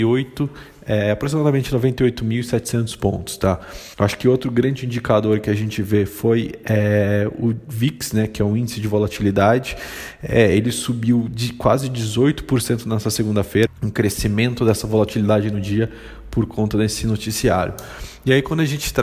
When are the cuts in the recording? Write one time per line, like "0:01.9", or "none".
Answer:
0:03.9
0:13.7